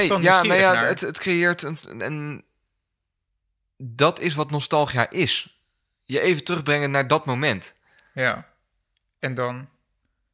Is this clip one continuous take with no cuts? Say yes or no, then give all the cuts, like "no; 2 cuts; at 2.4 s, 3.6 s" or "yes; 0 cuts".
yes; 0 cuts